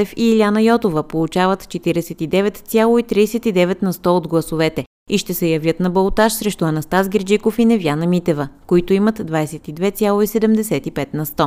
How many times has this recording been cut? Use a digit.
0